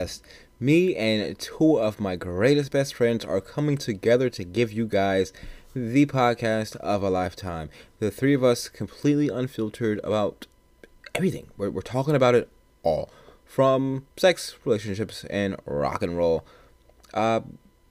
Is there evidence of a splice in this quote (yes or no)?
no